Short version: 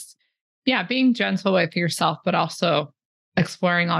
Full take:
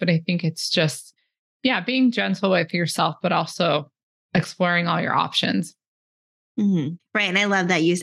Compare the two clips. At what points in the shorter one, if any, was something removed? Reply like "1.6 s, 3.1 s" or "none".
none